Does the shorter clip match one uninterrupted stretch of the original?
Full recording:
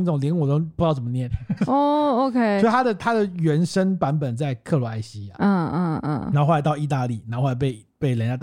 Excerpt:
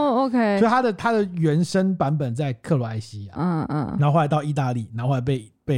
no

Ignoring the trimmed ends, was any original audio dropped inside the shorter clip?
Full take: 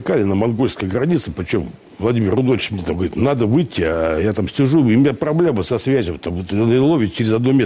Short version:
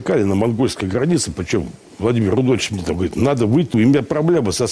yes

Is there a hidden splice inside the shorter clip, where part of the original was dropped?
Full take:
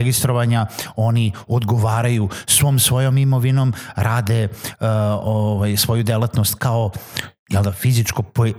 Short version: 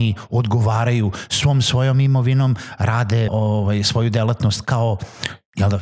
yes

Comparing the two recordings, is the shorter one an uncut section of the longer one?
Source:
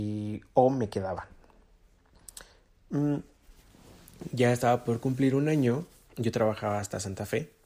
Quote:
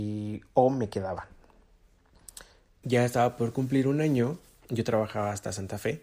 no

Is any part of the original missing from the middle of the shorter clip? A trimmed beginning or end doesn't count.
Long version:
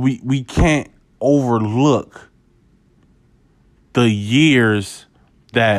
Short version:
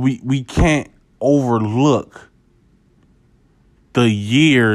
no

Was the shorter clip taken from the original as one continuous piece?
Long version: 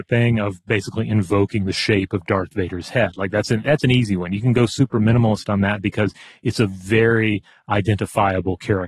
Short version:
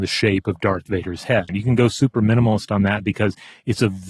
no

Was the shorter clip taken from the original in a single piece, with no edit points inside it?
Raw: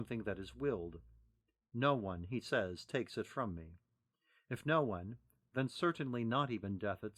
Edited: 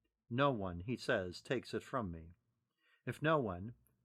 yes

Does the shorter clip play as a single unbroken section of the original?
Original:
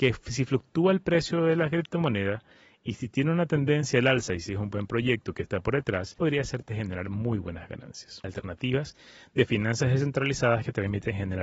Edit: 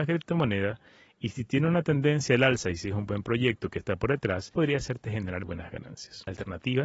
no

